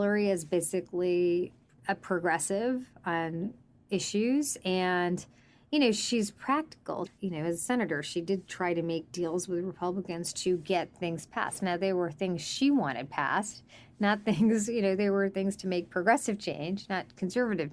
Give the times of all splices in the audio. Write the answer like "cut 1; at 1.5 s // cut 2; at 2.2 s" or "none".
cut 1; at 7.1 s

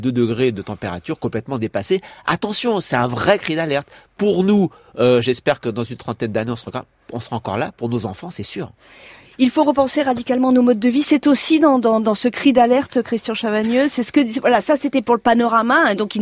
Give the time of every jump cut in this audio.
none

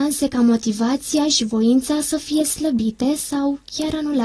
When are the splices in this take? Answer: none

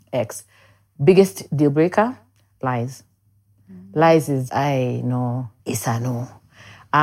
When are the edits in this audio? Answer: cut 1; at 4.5 s // cut 2; at 5.6 s

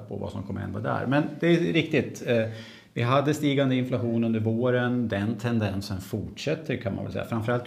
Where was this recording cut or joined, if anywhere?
none

